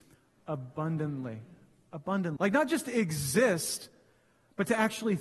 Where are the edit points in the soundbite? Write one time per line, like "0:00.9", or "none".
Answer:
0:02.4